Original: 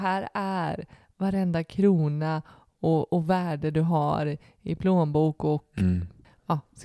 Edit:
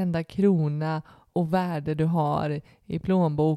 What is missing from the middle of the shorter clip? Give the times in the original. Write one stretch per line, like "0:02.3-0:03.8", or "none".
0:02.7-0:03.1